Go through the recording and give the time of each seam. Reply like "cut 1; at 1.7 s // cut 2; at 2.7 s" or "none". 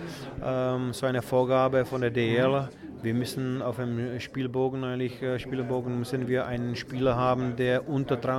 none

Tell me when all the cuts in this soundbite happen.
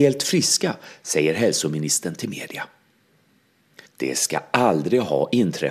cut 1; at 3.8 s

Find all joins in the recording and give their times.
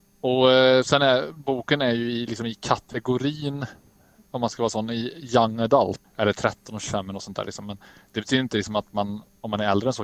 cut 1; at 6.0 s

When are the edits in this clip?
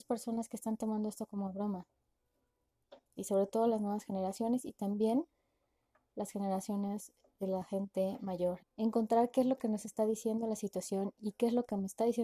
cut 1; at 3.2 s // cut 2; at 8.6 s

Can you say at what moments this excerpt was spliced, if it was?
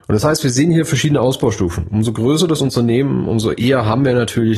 none

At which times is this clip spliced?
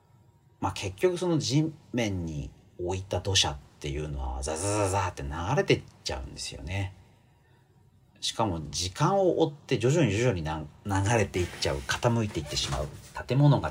none

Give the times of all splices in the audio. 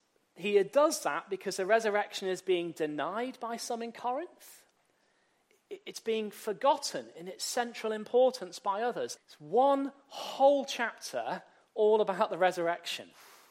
cut 1; at 9.2 s

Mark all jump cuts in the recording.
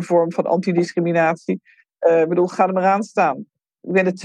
none

